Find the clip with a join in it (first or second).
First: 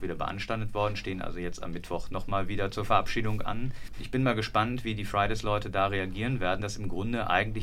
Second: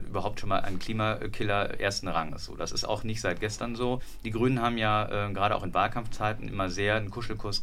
first